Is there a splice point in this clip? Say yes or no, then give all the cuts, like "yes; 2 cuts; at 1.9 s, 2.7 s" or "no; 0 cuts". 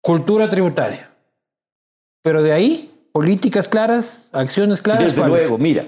no; 0 cuts